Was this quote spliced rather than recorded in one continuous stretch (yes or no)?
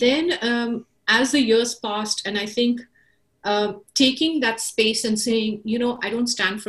no